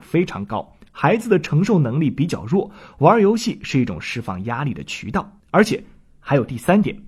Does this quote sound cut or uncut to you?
cut